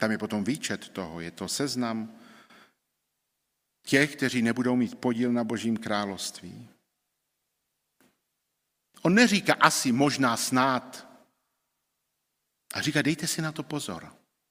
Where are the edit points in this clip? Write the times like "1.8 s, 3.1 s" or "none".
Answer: none